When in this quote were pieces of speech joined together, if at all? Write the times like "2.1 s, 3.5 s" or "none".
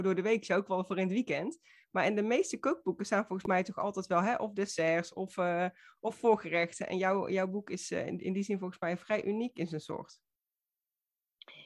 none